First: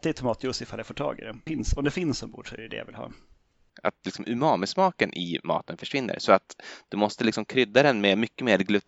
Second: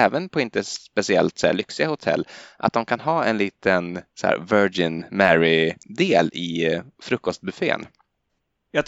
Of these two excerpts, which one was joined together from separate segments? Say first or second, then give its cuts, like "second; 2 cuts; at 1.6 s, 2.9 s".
first; 2 cuts; at 1.5 s, 3.7 s